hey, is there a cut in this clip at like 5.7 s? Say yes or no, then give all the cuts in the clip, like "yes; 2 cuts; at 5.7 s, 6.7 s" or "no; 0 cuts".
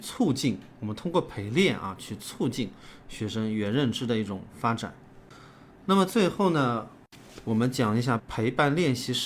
no; 1 cut; at 8.2 s